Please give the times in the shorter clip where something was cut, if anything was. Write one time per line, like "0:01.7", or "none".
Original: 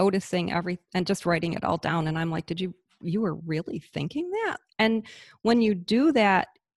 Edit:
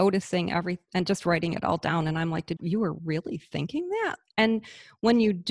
0:02.6

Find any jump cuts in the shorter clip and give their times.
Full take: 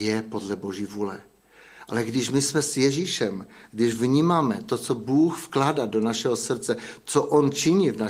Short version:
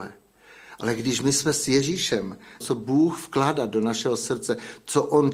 0:02.6

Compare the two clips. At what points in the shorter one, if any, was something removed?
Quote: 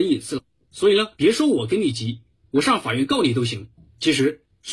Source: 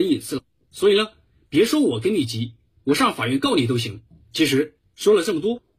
0:01.1

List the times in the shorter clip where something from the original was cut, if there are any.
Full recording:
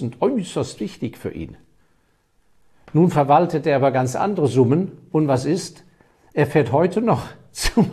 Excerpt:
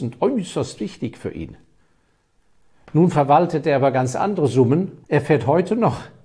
0:05.0

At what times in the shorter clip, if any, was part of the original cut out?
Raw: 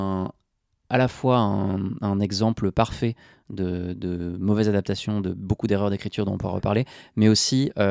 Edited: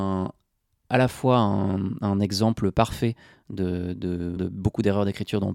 0:04.4

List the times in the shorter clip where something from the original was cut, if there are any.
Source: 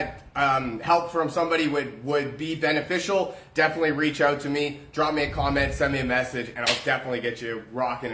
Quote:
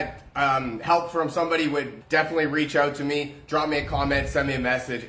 0:02.0

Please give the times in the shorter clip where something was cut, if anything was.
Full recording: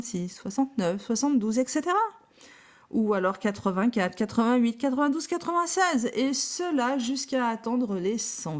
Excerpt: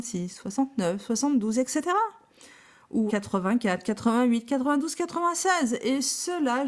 0:03.1

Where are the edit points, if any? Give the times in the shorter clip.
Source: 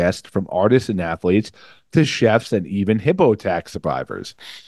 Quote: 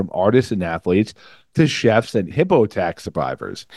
0:02.3

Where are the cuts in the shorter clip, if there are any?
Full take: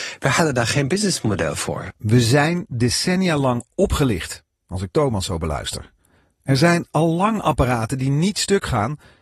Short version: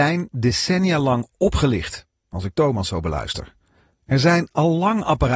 none

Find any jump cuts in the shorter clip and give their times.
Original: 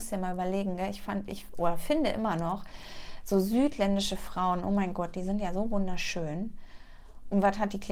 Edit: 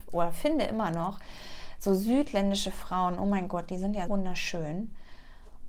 0:04.1

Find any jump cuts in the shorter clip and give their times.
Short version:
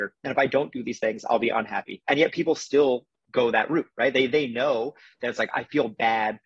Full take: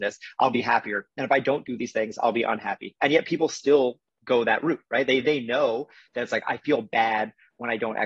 none

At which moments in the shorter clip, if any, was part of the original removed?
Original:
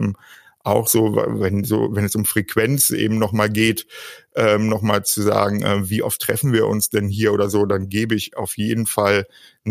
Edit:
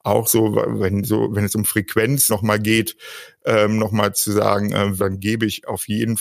0:02.3
0:05.0

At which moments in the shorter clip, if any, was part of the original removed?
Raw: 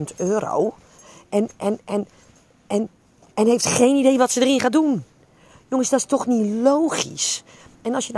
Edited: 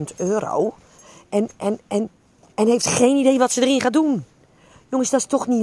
0:01.8

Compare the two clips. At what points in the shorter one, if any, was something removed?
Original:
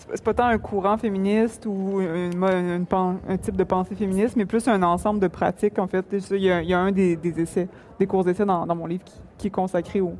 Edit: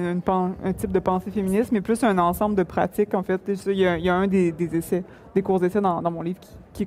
none

